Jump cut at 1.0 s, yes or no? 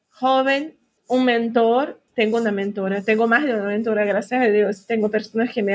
yes